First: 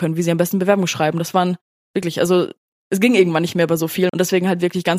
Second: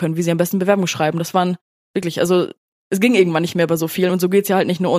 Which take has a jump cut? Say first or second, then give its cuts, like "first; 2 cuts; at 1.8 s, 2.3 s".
first; 1 cut; at 4.1 s